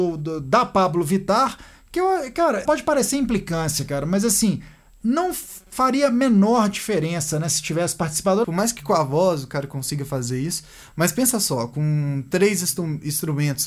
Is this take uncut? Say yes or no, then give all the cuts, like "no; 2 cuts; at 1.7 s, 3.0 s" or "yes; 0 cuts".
no; 2 cuts; at 2.7 s, 8.4 s